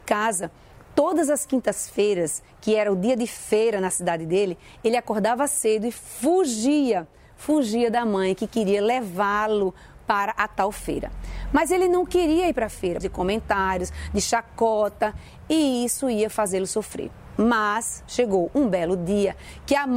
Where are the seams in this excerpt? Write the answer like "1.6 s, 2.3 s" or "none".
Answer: 13.0 s